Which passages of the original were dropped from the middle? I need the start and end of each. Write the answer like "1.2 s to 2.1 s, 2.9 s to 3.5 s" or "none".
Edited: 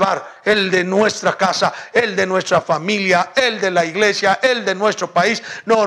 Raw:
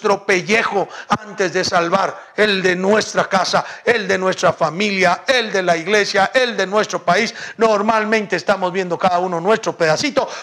none